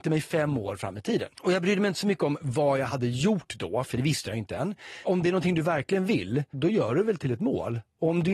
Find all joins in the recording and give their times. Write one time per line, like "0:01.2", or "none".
0:01.3
0:05.0
0:06.5